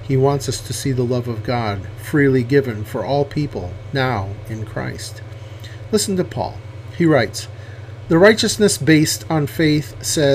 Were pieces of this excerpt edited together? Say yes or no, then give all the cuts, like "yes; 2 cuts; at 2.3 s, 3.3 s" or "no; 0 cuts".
no; 0 cuts